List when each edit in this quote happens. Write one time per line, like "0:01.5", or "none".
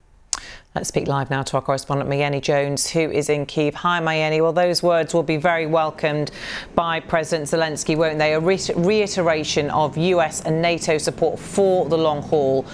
none